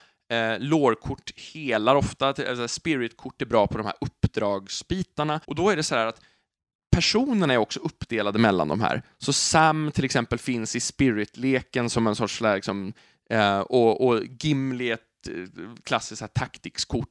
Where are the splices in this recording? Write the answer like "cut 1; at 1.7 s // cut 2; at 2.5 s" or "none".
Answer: cut 1; at 5.4 s